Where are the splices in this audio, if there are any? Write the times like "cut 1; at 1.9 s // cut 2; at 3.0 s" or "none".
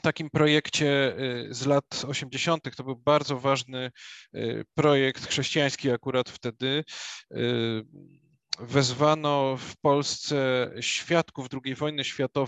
none